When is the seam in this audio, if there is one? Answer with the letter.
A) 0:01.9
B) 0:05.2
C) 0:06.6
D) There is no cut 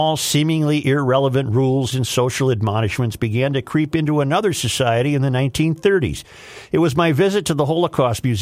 A